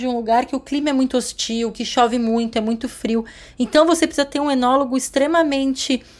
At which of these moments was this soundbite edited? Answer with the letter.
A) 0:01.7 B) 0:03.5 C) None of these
C